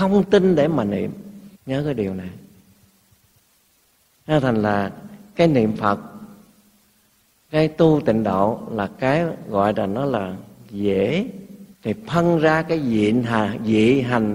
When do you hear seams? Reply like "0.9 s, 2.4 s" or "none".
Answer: 1.5 s, 11.7 s